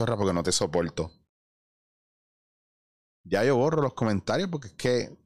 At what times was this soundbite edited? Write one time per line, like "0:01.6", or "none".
none

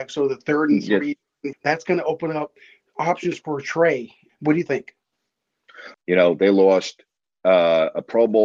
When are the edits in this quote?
0:01.5
0:04.3
0:05.9

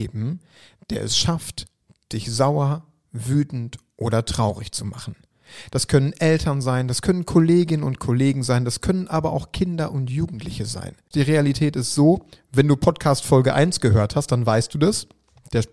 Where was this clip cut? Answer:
0:11.1

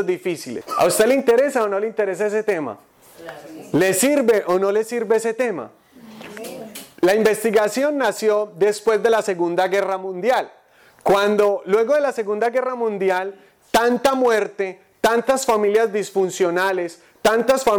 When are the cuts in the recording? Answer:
none

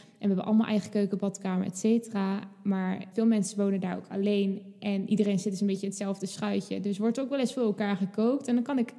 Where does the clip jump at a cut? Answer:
0:03.1

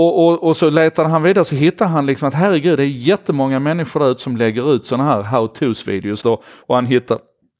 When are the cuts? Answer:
0:06.2

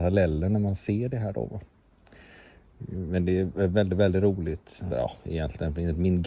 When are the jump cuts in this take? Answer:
0:04.9

